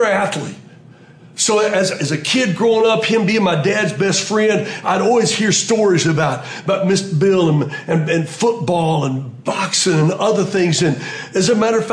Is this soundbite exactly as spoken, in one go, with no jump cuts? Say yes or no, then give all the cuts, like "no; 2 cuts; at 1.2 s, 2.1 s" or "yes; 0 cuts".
yes; 0 cuts